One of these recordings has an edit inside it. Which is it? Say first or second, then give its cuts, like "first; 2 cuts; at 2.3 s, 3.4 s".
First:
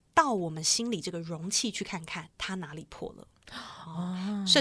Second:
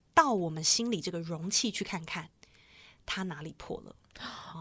first; 1 cut; at 2.3 s